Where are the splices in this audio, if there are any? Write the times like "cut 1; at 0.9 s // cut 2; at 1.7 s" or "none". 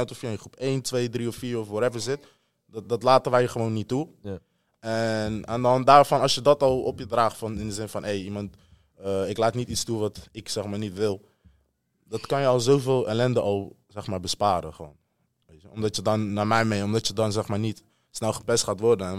none